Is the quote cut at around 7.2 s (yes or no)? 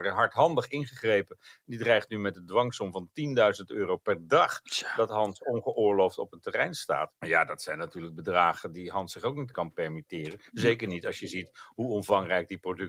yes